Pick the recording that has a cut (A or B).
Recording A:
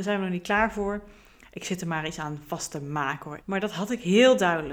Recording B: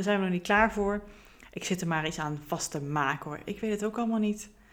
A